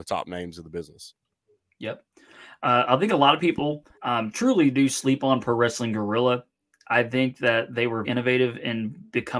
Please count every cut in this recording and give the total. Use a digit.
2